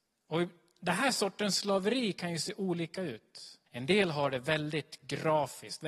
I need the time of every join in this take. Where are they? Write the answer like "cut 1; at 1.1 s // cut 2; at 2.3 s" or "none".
cut 1; at 3.7 s